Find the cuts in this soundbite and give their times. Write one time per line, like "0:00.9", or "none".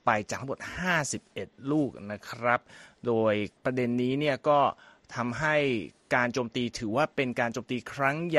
0:03.6